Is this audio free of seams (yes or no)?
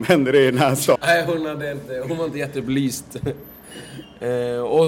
no